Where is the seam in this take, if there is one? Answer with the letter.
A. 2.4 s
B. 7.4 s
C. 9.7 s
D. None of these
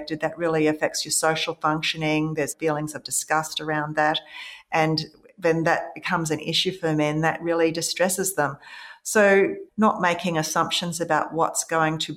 C